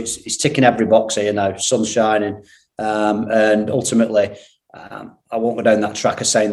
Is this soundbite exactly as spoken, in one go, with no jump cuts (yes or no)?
yes